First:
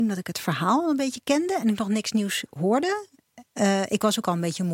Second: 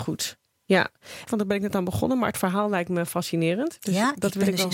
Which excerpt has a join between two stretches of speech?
second; 1 cut; at 1.3 s

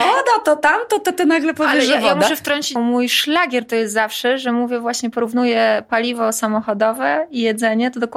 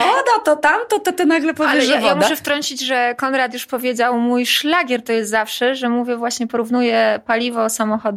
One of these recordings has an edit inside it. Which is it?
first; 1 cut; at 2.8 s

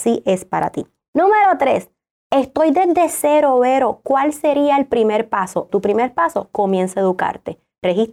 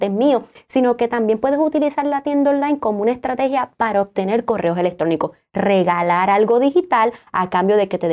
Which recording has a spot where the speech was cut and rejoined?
first; 1 cut; at 5.7 s

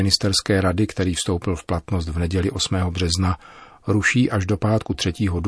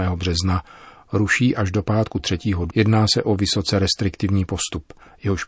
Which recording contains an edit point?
second; 1 cut; at 2.7 s

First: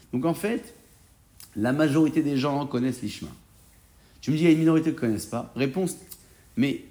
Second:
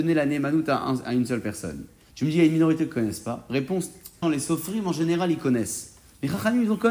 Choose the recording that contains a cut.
second; 2 cuts; at 2.1 s, 4.2 s

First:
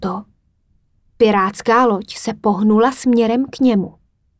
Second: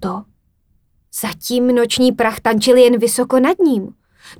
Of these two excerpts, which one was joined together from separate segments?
second; 1 cut; at 1.0 s

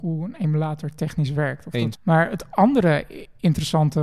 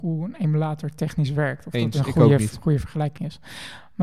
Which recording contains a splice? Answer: first; 1 cut; at 1.9 s

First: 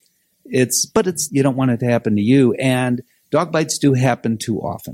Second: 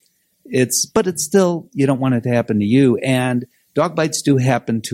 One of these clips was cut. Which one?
first; 1 cut; at 1.3 s

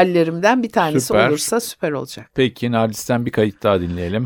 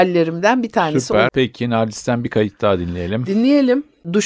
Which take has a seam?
second; 1 cut; at 1.3 s

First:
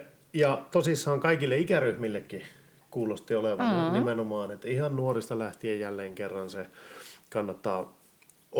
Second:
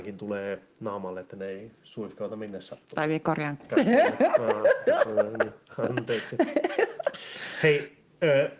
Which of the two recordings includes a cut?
second; 1 cut; at 3.6 s

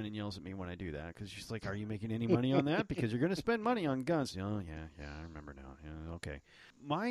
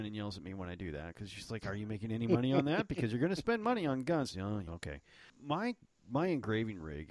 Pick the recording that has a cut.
second; 1 cut; at 4.7 s

